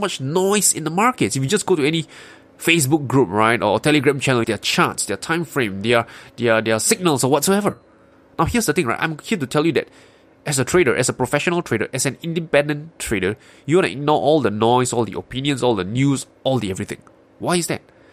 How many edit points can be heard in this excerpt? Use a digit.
1